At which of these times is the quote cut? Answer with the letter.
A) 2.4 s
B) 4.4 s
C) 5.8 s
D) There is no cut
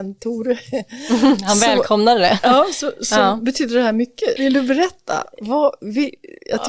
B